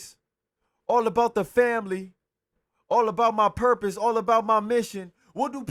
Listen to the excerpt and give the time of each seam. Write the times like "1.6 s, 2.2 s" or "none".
2.7 s